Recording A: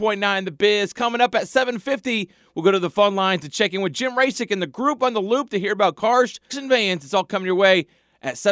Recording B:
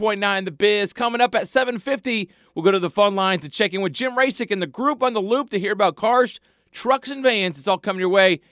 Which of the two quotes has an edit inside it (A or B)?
A